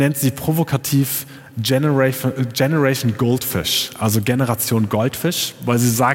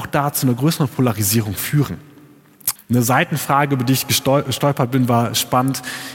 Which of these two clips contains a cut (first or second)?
second